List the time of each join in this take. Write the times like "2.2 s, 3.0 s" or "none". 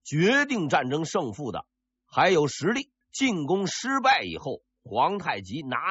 3.0 s